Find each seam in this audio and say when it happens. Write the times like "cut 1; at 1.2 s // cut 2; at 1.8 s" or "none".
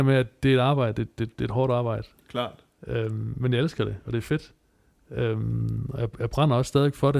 none